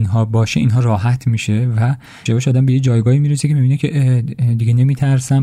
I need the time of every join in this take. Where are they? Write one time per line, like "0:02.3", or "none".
0:02.3